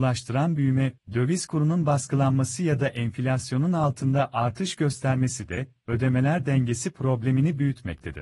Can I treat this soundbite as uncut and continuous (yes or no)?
no